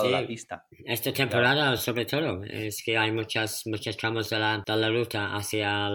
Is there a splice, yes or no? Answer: no